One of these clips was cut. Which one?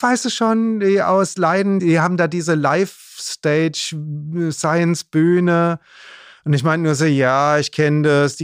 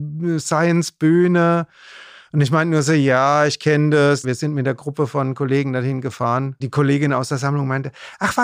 second; 1 cut; at 4.2 s

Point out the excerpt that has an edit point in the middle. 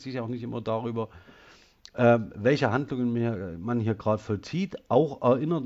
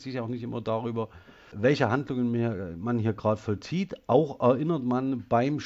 second; 1 cut; at 1.5 s

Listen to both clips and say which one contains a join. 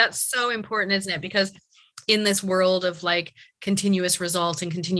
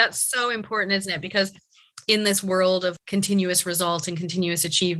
second; 1 cut; at 3.0 s

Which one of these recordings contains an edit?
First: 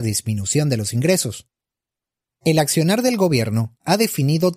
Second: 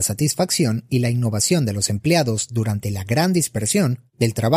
first; 1 cut; at 2.3 s

